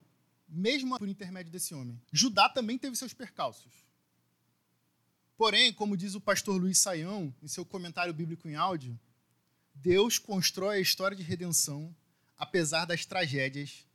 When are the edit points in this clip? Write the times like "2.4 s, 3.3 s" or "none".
1.0 s, 2.0 s, 9.6 s